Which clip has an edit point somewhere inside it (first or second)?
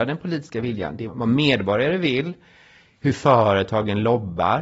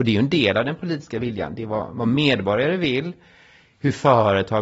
first